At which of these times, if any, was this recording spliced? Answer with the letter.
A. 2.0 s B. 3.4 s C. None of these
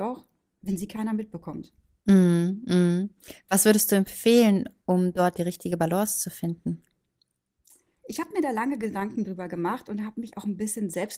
C